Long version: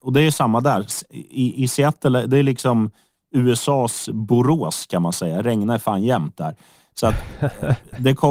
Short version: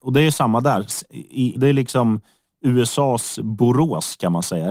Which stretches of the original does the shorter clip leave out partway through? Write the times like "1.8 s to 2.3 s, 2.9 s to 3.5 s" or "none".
1.6 s to 2.3 s